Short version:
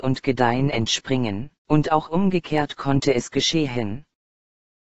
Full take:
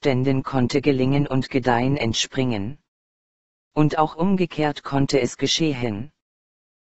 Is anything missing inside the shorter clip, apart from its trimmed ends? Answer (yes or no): yes